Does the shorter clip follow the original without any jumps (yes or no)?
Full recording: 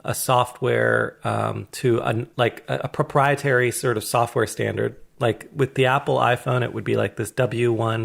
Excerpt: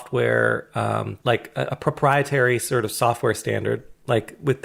no